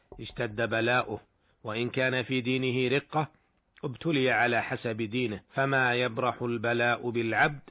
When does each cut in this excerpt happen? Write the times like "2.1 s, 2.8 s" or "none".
5.4 s